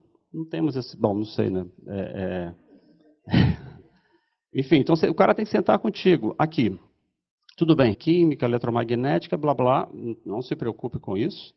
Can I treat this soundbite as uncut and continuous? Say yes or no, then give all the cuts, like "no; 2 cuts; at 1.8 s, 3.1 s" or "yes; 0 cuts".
no; 1 cut; at 7.9 s